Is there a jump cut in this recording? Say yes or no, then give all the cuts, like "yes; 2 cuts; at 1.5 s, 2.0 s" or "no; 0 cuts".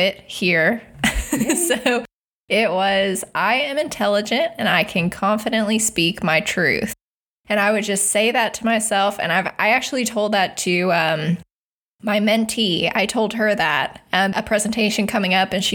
yes; 1 cut; at 14.3 s